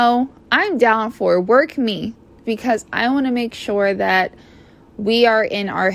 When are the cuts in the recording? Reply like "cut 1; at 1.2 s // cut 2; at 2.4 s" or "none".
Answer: cut 1; at 2.4 s